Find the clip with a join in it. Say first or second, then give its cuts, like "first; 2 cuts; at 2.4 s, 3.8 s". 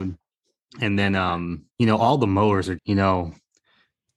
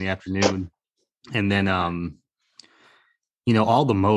first; 2 cuts; at 1.7 s, 2.8 s